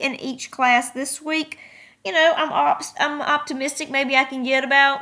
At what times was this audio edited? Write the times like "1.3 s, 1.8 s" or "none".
none

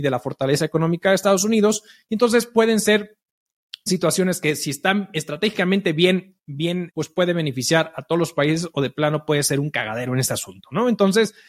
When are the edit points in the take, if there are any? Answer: 6.9 s

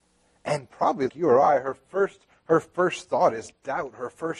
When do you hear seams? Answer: 1.1 s

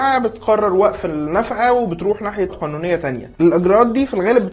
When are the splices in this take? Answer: 2.5 s

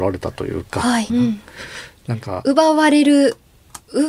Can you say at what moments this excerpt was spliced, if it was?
1.1 s

